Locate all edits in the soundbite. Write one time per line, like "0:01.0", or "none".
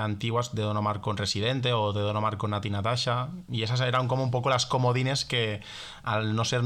none